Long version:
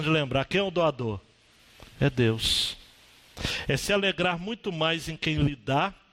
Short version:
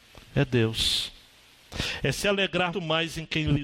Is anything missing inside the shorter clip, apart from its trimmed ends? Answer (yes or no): yes